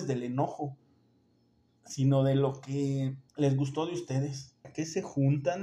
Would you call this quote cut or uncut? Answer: cut